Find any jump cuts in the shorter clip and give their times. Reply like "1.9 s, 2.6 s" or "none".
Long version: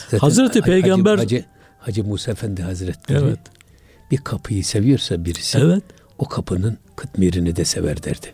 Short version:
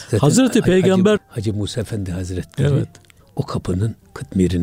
1.2 s, 3.2 s